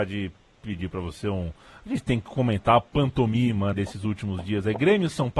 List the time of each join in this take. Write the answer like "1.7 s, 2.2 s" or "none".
3.7 s

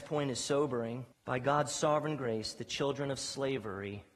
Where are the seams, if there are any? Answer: 1.1 s

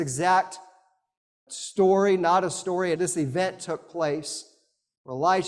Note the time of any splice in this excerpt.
1.5 s, 3.0 s

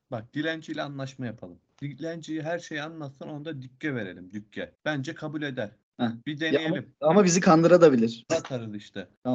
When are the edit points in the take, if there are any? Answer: 6.9 s, 8.3 s

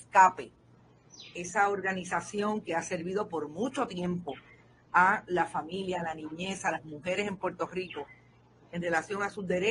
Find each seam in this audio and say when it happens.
none

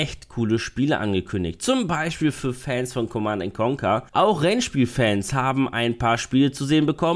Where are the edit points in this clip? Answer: 4.1 s

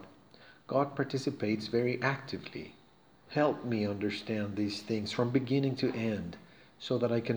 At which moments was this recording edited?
3.2 s

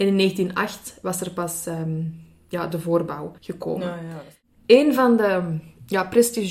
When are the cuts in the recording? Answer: 3.4 s

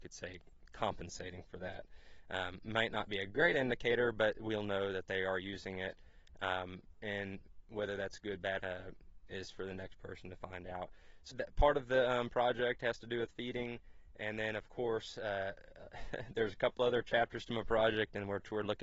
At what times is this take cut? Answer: 8.6 s, 11.3 s

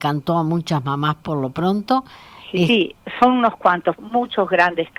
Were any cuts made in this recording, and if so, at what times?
2.7 s, 4.0 s

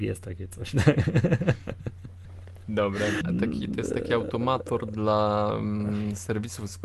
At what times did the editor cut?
3.2 s

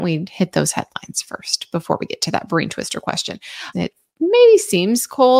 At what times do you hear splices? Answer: 3.7 s

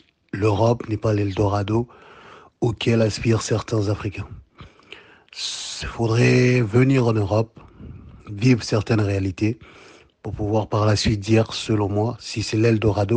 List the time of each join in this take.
none

